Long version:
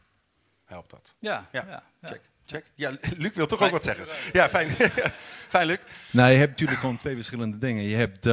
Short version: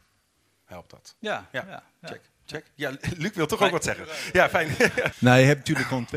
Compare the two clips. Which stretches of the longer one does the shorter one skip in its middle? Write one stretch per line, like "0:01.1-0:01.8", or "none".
0:05.1-0:06.0